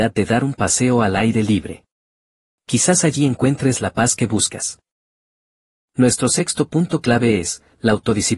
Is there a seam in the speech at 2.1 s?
no; 0 cuts

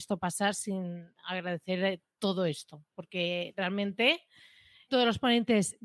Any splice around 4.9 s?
yes; 2 cuts; at 2.9 s, 4.9 s

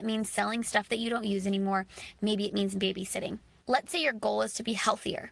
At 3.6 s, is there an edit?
yes; 1 cut; at 3.6 s

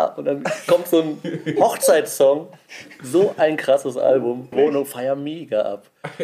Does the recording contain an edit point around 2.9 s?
no; 1 cut; at 4.5 s

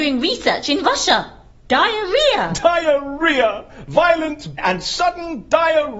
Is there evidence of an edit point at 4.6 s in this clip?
yes; 2 cuts; at 1.5 s, 4.6 s

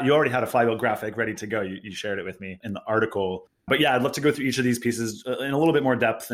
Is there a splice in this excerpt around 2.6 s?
yes; 1 cut; at 2.6 s

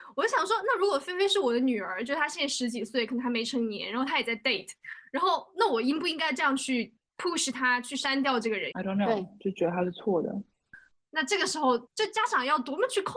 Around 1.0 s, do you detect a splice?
no; 2 cuts; at 8.7 s, 10.9 s

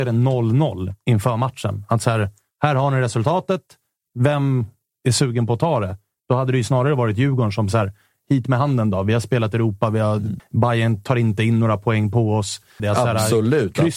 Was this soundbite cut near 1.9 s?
no; 2 cuts; at 10.4 s, 12.8 s

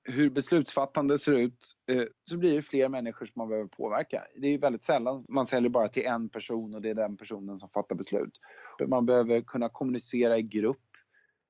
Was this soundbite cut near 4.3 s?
no; 2 cuts; at 2.1 s, 8.8 s

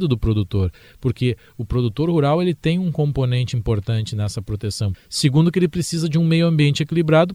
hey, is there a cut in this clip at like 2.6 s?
no; 1 cut; at 4.9 s

